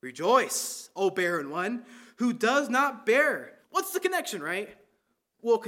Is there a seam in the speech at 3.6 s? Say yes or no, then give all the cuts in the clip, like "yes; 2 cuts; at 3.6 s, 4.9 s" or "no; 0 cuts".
yes; 1 cut; at 3.6 s